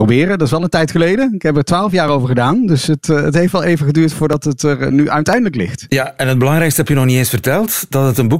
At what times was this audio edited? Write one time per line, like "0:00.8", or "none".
none